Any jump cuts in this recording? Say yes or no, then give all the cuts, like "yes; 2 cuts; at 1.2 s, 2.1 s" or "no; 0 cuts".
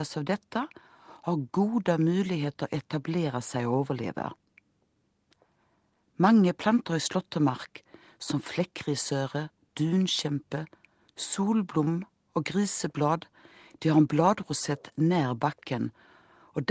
no; 0 cuts